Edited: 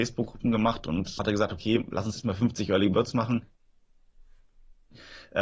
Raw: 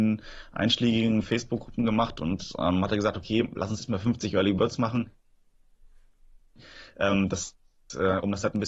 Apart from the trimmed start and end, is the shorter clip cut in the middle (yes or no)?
yes